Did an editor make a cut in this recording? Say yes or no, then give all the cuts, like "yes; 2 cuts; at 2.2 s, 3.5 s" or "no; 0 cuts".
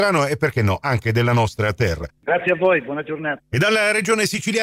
yes; 2 cuts; at 2.2 s, 3.4 s